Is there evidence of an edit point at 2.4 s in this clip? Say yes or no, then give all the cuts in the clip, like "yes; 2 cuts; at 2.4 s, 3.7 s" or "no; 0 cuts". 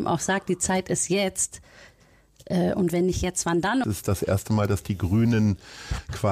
no; 1 cut; at 3.8 s